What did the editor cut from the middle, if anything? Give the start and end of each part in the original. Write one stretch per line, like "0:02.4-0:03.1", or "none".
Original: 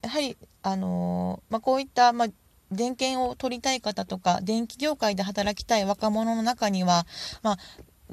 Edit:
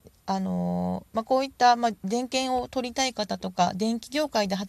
0:02.3-0:02.6

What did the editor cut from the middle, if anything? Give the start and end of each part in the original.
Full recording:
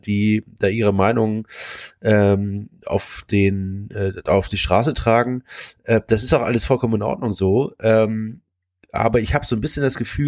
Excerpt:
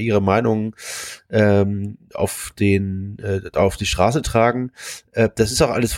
none

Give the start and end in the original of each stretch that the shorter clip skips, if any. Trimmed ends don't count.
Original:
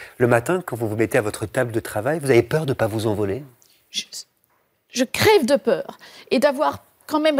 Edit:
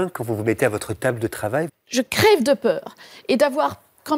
0:02.2-0:04.7

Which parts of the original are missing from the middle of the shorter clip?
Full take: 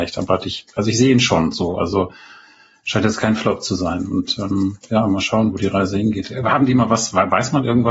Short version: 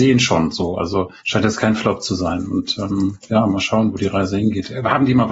0:02.2-0:02.8

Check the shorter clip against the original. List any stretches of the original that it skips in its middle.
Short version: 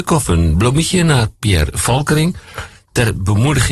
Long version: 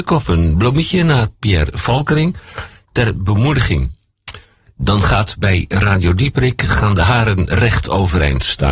none

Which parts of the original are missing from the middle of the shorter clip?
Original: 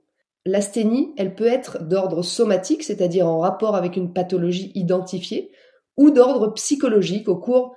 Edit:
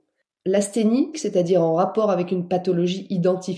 0:01.1-0:02.8

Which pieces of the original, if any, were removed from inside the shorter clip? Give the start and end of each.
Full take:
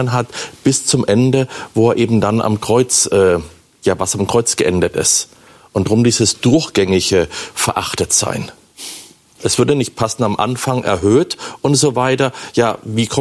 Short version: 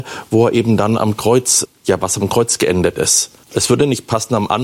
0:03.1-0:03.6
0:05.4-0:09.3

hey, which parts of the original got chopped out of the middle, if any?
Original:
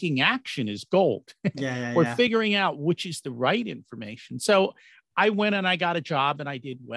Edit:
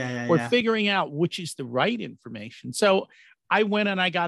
none

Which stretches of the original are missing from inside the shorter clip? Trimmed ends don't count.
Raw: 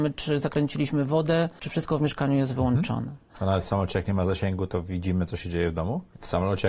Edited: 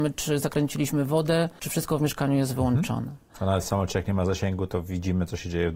none

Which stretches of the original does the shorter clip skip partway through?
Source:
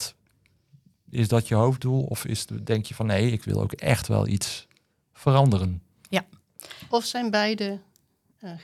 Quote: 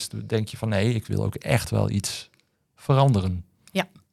none

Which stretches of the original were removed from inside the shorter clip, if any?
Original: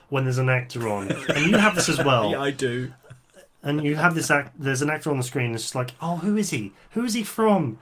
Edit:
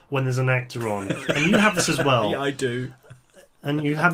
none

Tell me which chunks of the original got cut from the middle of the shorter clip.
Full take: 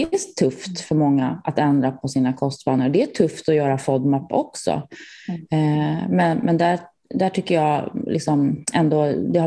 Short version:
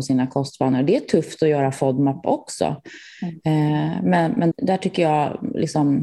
0:06.6-0:07.0

